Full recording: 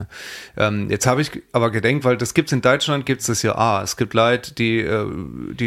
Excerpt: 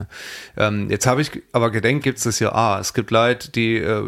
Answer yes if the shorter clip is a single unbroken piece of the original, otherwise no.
no